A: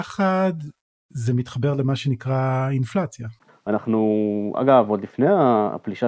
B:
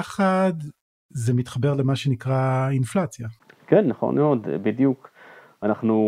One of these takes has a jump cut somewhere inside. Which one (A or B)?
A